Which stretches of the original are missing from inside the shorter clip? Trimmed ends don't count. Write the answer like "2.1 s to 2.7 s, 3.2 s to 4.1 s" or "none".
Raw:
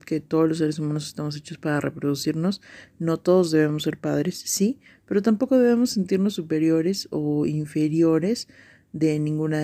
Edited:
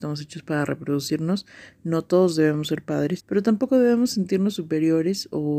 4.3 s to 5.0 s